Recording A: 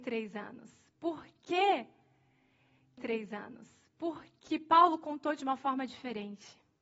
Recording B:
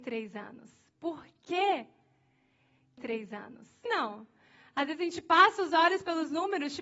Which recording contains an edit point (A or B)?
B